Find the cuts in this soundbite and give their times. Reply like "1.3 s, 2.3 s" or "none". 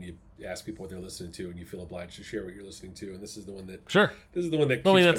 none